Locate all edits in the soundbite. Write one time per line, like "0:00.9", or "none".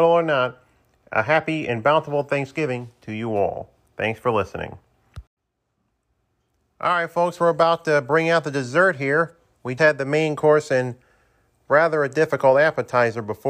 0:09.8